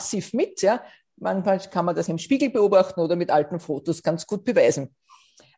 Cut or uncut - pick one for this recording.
cut